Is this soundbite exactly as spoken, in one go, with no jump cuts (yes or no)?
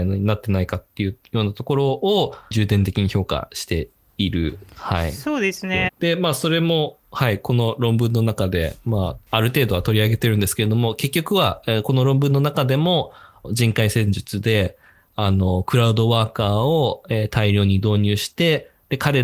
no